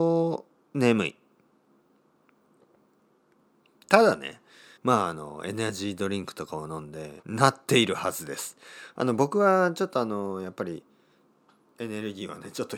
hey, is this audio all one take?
no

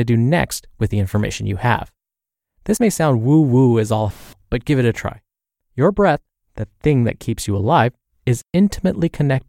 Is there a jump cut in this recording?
no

